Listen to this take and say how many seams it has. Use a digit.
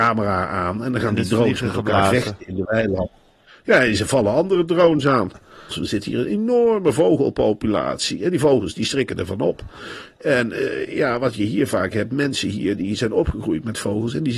1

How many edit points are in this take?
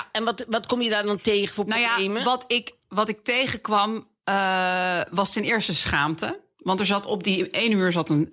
0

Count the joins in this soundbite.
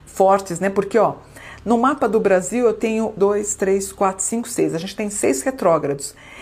1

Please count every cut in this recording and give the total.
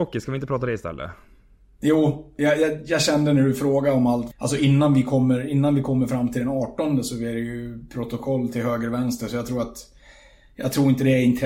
1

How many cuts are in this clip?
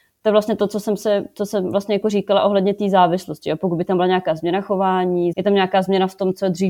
1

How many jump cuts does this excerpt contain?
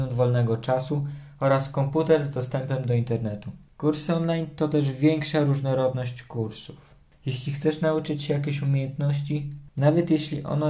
2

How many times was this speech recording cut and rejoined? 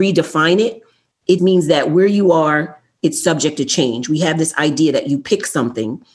1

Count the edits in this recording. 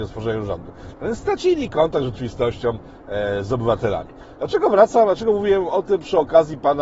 0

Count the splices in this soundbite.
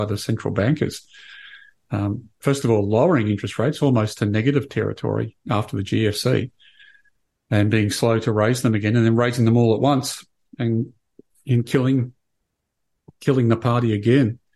1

